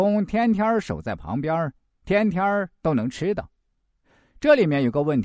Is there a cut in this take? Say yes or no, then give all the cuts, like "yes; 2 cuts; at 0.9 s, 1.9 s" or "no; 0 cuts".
no; 0 cuts